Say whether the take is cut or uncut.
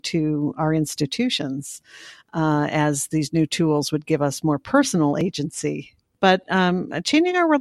uncut